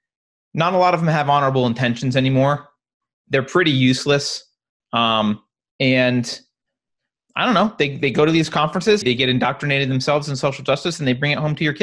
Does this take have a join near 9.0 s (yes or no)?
yes